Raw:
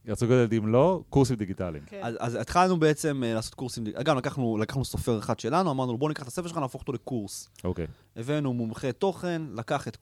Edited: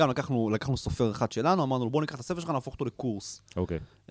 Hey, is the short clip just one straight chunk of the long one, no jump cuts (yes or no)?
yes